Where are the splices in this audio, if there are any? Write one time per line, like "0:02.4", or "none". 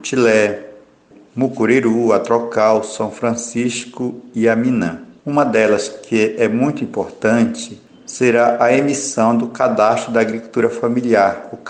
0:05.2